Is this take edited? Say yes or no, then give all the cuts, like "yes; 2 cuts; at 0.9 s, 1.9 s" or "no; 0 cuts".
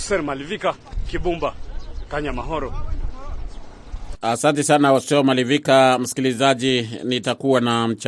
yes; 1 cut; at 1.0 s